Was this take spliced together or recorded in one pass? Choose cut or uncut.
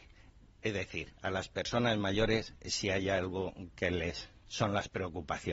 cut